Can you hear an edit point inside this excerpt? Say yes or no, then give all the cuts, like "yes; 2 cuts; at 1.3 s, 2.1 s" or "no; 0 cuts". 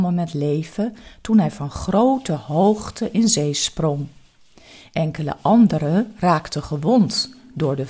no; 0 cuts